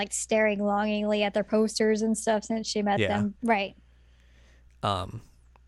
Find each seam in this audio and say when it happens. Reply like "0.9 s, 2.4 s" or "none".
3.4 s

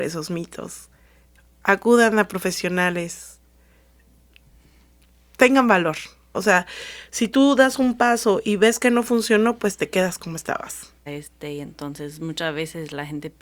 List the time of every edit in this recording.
6.3 s, 11.1 s

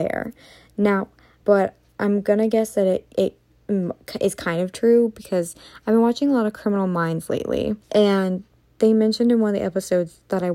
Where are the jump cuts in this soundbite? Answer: 1.4 s, 7.8 s

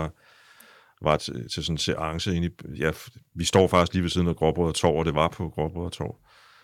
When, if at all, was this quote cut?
1.2 s

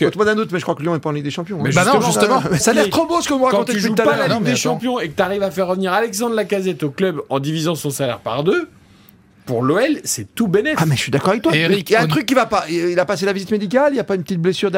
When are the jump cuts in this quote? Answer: 2.6 s

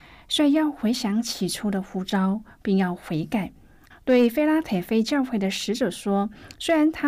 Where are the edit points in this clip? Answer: 3.9 s

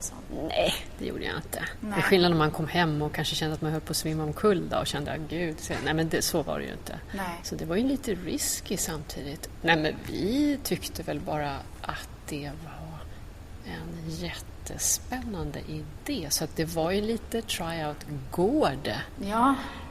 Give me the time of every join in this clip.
7.4 s

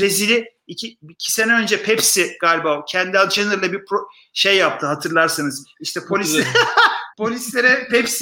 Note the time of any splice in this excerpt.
7.1 s

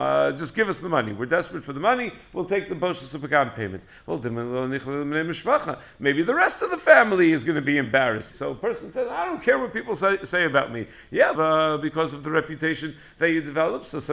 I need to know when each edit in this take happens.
8.3 s, 11.3 s

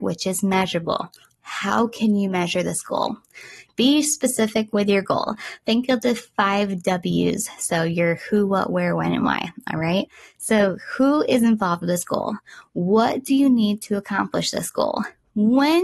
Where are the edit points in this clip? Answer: 3.7 s

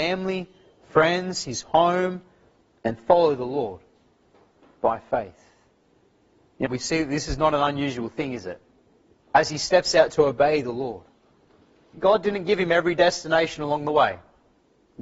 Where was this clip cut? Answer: 6.7 s, 9.3 s, 11.9 s

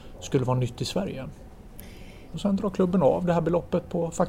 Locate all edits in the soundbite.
2.3 s

